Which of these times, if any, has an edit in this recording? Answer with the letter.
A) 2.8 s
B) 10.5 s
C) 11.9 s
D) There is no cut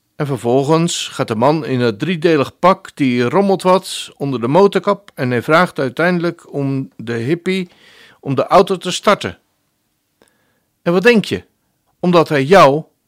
C